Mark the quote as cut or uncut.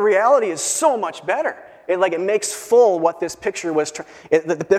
uncut